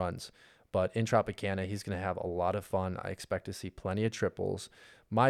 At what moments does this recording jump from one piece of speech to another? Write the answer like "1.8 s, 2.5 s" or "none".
none